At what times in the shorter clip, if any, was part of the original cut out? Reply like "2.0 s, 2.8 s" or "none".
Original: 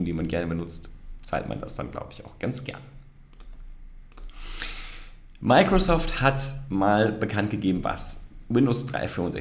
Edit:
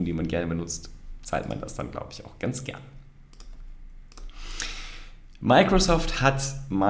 none

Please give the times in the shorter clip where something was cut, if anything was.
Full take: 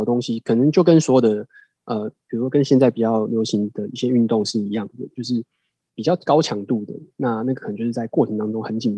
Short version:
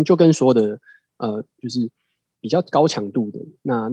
1.6 s

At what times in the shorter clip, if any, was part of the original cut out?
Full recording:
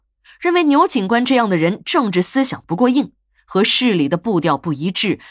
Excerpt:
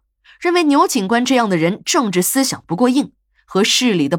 none

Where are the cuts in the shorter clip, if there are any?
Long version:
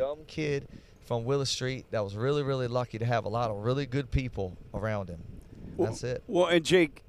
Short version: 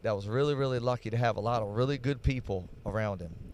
none

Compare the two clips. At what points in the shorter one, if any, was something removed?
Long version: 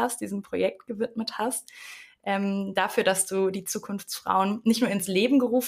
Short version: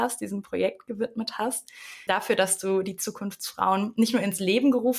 2.1 s

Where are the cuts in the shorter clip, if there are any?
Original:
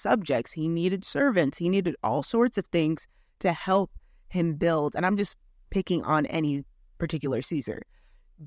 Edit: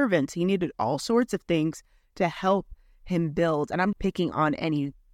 3.9 s

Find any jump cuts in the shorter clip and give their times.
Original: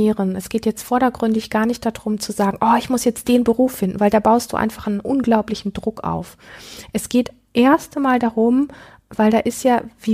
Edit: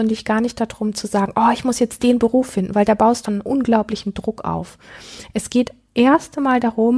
3.3 s

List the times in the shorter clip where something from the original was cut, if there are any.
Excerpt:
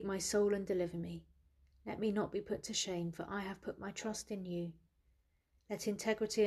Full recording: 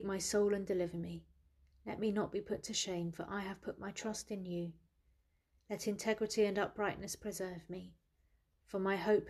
none

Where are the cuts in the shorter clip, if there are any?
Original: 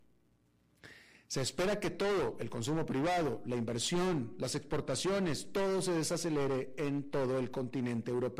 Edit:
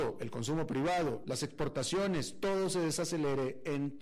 1.2 s

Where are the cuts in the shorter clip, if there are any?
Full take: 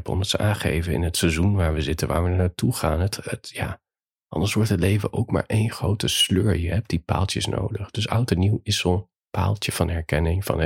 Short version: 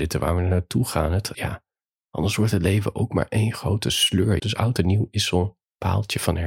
1.3 s, 4.4 s

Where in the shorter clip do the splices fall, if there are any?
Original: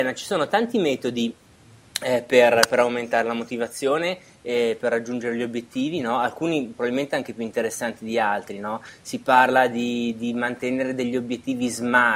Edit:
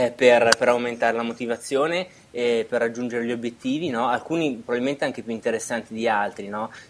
none

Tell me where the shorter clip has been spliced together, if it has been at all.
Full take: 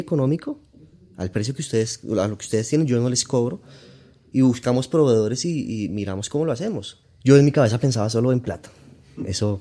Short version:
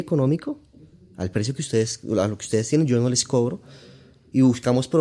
none

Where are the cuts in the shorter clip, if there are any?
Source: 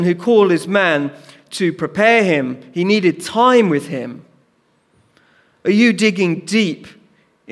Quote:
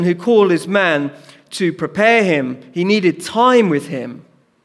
none

